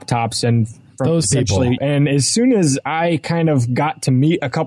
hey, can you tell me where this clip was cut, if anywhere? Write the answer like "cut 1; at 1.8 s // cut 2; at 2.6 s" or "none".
cut 1; at 1.8 s